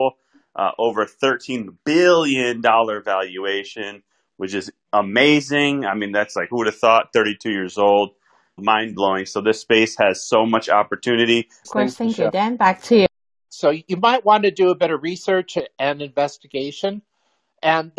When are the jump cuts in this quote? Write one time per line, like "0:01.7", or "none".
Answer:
0:08.6
0:11.6
0:13.5

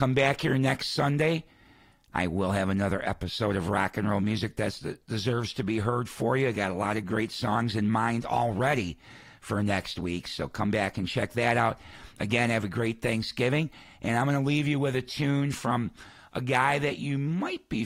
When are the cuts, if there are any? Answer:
none

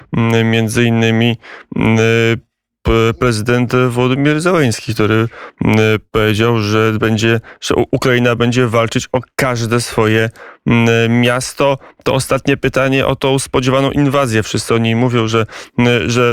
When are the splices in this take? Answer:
none

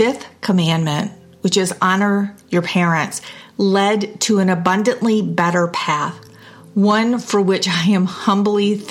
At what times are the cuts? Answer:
none

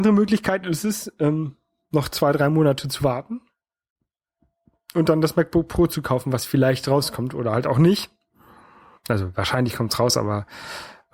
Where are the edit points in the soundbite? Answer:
none

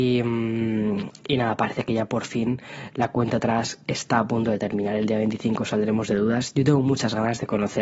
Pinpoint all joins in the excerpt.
none

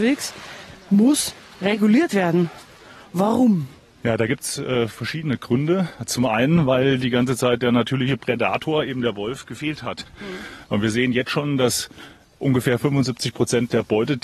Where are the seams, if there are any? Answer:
none

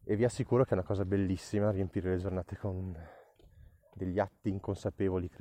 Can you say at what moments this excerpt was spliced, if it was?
none

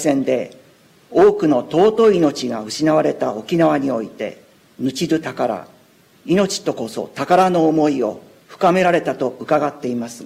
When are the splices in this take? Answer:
0:04.6

